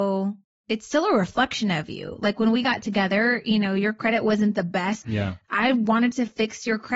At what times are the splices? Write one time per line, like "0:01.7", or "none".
0:05.0